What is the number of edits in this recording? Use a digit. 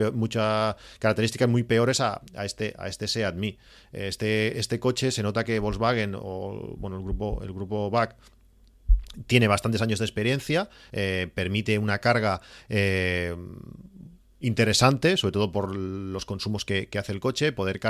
0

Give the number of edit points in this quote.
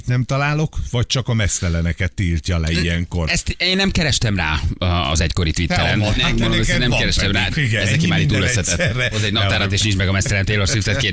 2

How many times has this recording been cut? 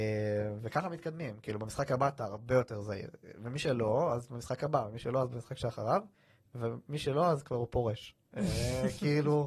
0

